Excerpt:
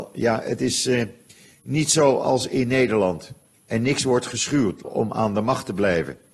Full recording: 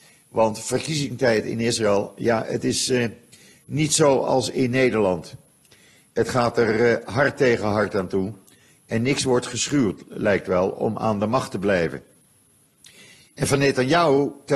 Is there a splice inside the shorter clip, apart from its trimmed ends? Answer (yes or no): yes